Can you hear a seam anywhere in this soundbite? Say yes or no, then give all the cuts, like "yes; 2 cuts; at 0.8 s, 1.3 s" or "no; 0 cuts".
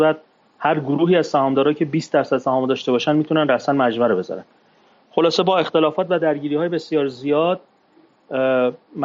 no; 0 cuts